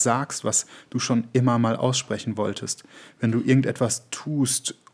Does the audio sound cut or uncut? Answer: uncut